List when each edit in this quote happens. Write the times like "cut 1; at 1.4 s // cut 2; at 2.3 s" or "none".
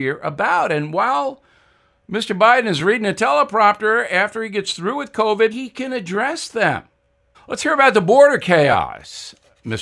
cut 1; at 5.5 s // cut 2; at 7.3 s